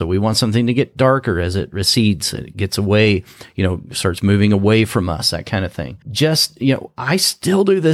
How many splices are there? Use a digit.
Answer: 1